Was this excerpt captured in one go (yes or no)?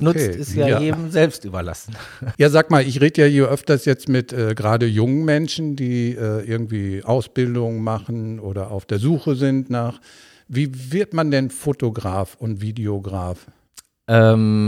no